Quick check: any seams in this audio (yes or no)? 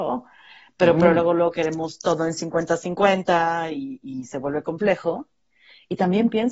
no